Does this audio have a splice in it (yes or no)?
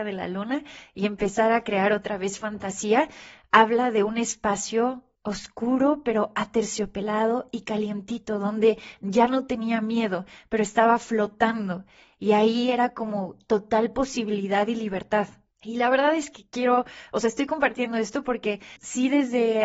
no